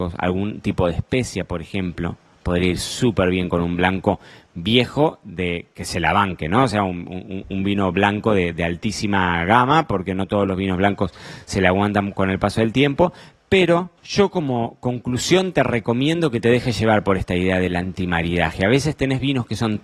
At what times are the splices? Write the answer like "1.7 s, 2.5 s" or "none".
14.0 s